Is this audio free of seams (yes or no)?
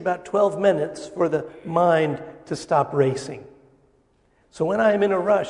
no